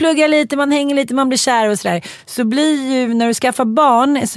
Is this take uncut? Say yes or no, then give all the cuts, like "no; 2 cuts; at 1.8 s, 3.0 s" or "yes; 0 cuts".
yes; 0 cuts